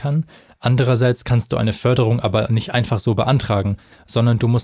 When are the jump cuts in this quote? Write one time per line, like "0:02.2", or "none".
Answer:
none

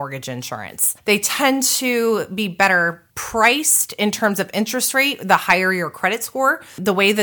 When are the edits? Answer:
0:01.0
0:03.1

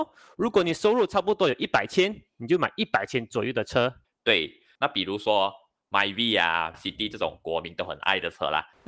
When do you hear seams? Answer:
0:04.8
0:06.7

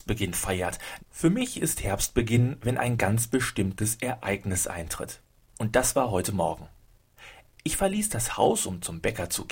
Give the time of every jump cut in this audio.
0:01.0

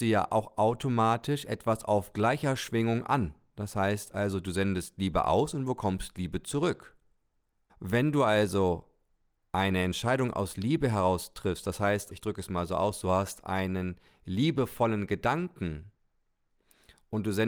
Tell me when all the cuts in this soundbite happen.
0:07.7
0:12.1

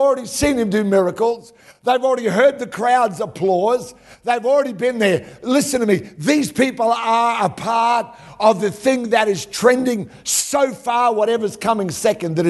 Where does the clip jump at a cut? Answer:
none

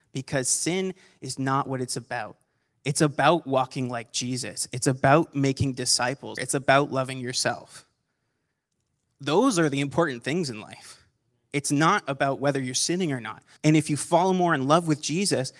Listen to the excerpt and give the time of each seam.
0:06.4
0:13.6

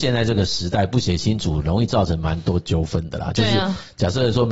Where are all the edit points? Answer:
none

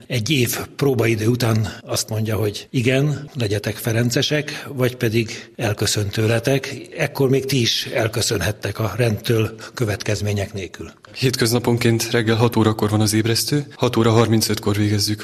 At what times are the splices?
none

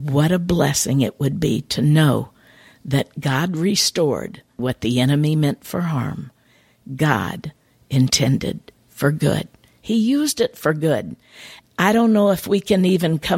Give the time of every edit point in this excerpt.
0:04.6
0:11.6

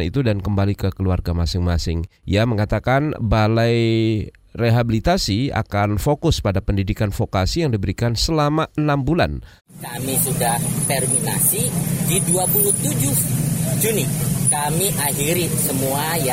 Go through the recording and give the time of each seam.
0:02.2
0:09.6

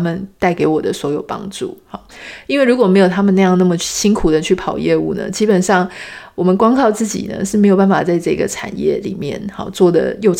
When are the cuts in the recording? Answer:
none

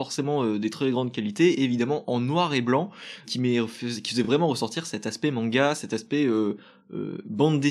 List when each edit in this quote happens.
none

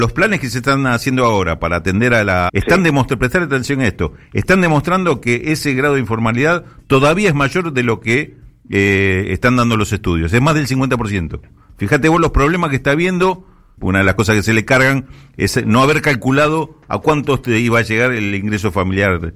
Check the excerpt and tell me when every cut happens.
0:02.5
0:13.8

